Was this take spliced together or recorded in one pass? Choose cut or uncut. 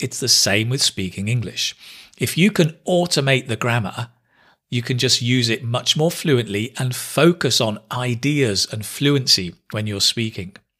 uncut